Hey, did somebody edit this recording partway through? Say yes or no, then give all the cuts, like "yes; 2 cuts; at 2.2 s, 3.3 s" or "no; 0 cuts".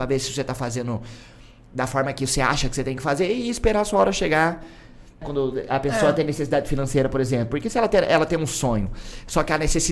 yes; 1 cut; at 5.2 s